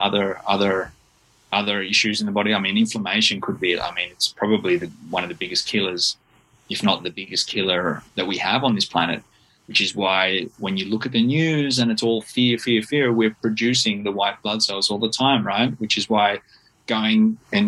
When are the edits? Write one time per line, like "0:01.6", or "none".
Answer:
0:08.1